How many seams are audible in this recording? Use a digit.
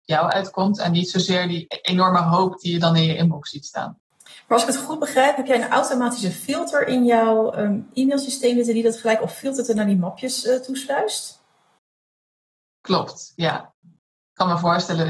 1